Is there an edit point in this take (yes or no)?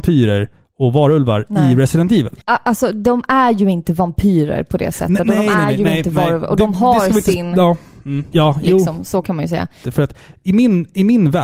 yes